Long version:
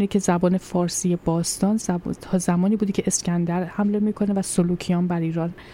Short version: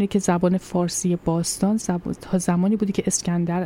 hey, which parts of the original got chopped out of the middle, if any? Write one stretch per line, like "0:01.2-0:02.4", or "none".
none